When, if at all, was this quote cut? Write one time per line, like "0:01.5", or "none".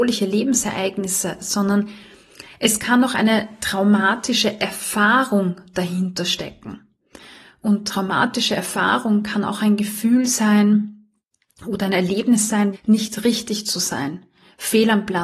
0:12.7